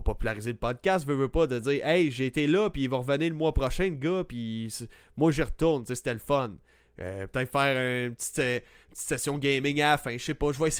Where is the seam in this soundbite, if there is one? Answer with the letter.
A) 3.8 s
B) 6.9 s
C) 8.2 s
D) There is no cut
D